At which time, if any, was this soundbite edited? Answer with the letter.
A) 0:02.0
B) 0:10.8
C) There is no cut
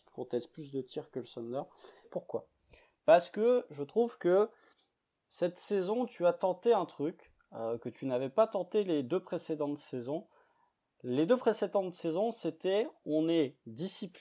A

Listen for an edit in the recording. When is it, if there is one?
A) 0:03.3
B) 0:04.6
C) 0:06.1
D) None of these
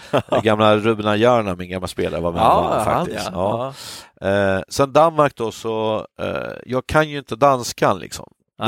D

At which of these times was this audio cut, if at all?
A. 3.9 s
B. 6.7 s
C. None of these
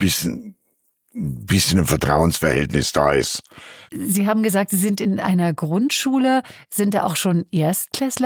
A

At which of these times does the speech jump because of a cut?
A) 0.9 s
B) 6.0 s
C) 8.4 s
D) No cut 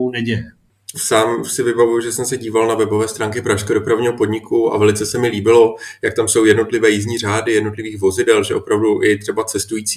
A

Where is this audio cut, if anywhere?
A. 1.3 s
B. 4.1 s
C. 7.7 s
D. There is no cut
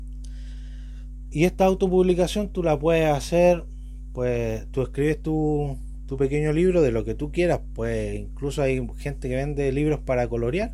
A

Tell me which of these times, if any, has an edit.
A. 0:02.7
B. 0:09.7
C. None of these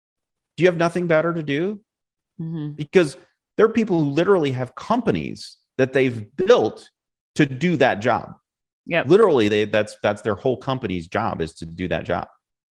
C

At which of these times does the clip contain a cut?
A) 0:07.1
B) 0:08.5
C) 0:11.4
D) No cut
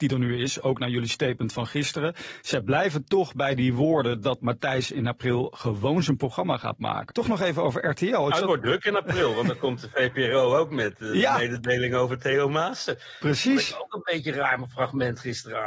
A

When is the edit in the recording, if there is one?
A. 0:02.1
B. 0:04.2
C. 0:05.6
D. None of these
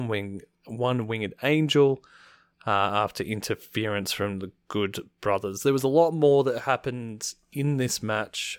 D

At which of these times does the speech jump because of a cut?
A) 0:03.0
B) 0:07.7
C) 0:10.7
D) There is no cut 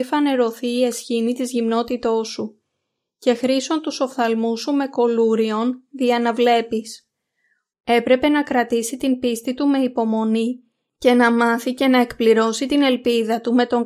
B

